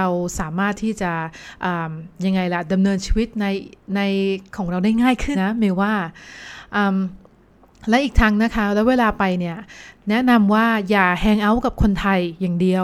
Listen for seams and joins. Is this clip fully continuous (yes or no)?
no